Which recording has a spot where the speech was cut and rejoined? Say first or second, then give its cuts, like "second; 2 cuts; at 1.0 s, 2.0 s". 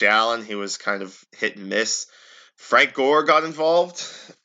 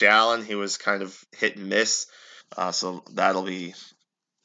second; 1 cut; at 2.4 s